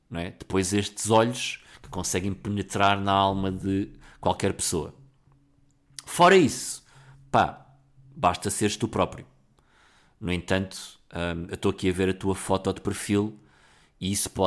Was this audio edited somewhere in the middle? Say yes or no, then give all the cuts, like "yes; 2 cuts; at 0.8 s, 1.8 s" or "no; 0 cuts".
no; 0 cuts